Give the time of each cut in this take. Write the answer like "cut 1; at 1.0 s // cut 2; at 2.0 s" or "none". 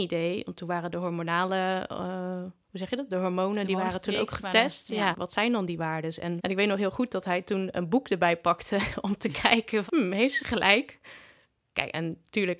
cut 1; at 5.1 s // cut 2; at 6.4 s // cut 3; at 9.9 s